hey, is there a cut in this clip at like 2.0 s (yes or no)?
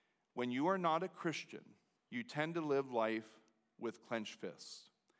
yes